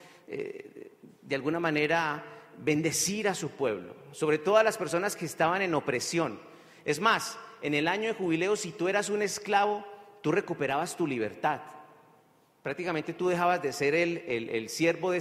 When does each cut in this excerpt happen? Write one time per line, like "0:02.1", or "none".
none